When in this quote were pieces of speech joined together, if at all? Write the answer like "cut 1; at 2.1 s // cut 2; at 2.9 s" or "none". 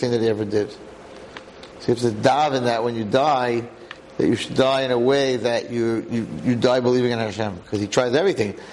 none